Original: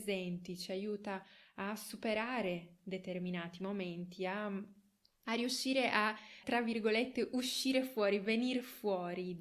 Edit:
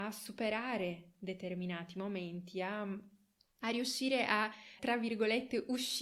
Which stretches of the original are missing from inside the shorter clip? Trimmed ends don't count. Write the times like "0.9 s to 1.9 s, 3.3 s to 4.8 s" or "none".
none